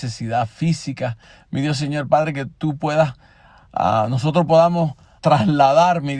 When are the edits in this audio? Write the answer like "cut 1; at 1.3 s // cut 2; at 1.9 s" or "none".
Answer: cut 1; at 5.2 s